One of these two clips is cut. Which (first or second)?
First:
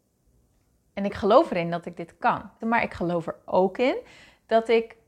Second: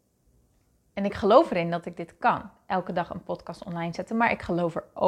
first